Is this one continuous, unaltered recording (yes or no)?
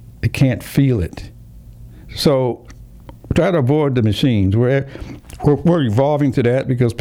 yes